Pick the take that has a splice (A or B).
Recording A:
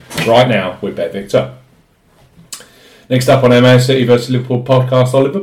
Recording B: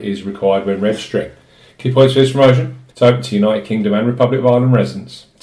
B